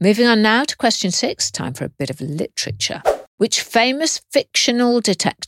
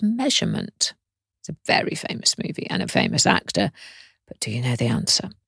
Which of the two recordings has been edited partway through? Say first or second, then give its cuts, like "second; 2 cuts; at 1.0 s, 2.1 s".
second; 2 cuts; at 1.4 s, 2.9 s